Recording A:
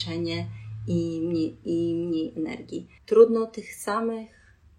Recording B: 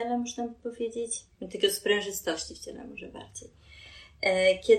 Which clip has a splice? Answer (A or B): A